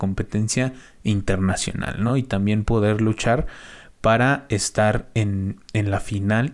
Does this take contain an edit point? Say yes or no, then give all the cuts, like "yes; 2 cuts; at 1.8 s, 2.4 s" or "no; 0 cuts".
no; 0 cuts